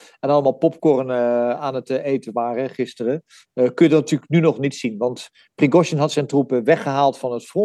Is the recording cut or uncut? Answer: uncut